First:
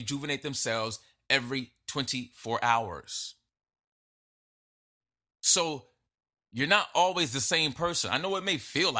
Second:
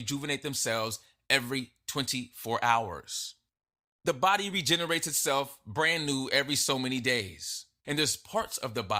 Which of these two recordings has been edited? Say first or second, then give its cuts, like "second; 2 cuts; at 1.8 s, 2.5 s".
second; 2 cuts; at 4.0 s, 7.8 s